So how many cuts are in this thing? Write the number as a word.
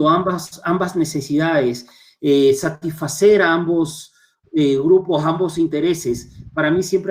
zero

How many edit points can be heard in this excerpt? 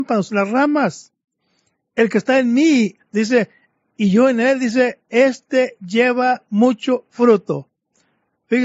one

